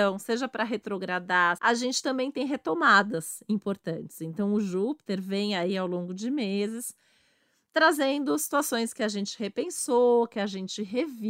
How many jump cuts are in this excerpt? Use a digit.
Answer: 1